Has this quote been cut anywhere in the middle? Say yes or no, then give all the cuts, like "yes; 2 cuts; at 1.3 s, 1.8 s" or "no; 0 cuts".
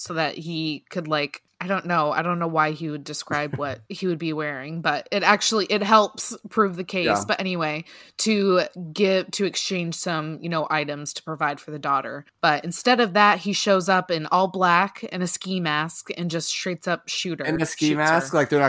no; 0 cuts